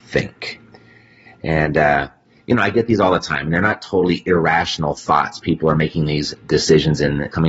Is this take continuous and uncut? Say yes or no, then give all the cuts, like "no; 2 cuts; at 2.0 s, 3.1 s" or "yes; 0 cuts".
yes; 0 cuts